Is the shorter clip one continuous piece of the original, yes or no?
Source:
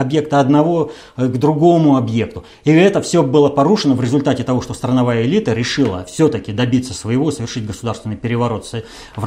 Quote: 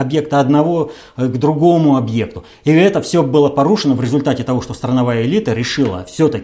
yes